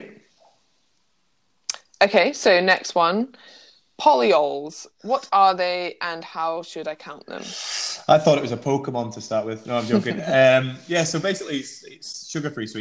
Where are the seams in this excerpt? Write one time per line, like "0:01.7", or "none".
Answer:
none